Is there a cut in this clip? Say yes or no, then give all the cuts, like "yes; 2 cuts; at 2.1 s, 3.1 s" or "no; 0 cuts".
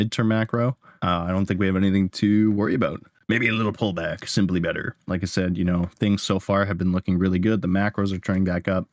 yes; 1 cut; at 5.0 s